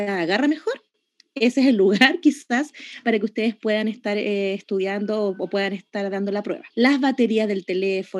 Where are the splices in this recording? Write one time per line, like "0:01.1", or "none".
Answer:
0:06.7